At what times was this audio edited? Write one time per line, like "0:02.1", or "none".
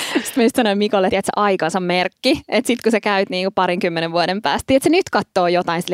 0:01.1